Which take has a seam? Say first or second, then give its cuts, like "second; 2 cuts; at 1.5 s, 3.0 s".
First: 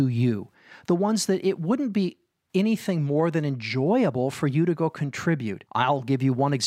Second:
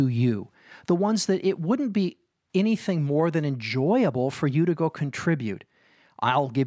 first; 1 cut; at 5.7 s